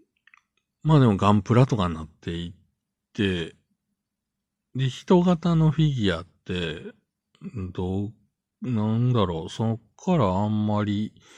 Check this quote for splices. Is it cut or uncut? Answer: uncut